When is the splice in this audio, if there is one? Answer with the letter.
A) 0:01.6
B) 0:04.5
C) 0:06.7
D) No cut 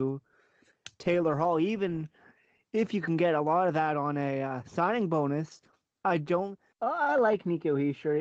C